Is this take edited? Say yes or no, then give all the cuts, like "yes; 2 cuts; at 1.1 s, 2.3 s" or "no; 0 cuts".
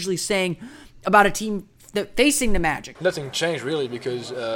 yes; 1 cut; at 3.0 s